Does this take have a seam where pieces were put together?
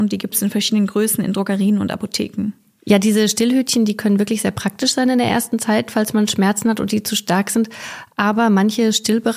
no; 0 cuts

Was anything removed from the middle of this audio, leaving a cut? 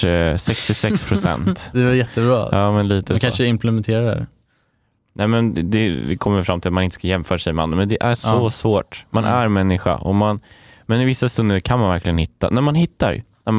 yes; 1 cut; at 1.7 s

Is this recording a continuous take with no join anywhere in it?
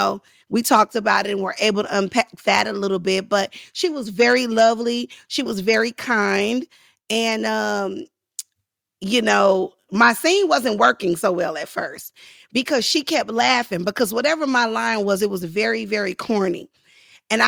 yes; 0 cuts

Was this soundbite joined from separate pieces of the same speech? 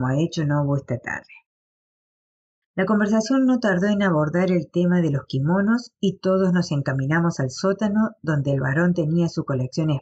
yes; 1 cut; at 2.6 s

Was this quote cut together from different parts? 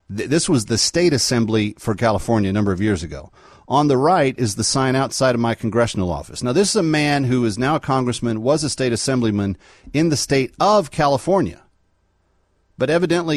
no; 0 cuts

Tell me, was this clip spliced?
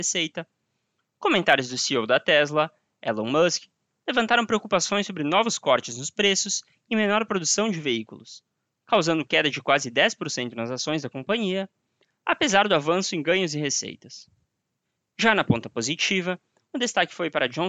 no; 0 cuts

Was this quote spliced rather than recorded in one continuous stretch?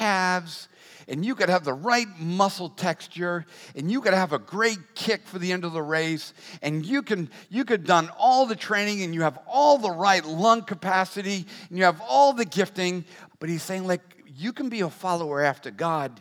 yes; 2 cuts; at 0.9 s, 13.3 s

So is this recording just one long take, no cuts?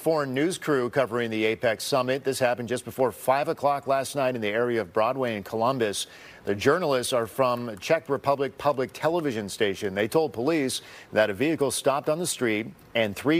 yes; 0 cuts

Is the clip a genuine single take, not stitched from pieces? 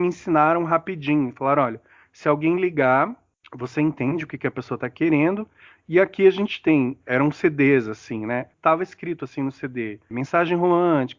yes; 0 cuts

